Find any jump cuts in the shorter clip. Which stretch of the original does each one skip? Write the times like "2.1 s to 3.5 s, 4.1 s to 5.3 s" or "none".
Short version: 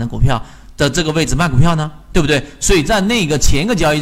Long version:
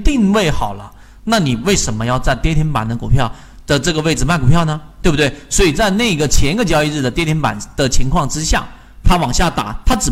none